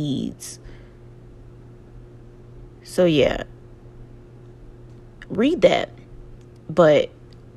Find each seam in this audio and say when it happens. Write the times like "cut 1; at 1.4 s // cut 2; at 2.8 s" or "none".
cut 1; at 5.3 s